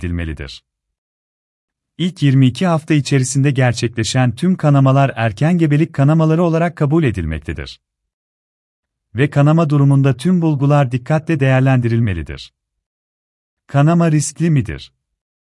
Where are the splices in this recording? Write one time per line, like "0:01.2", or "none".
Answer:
none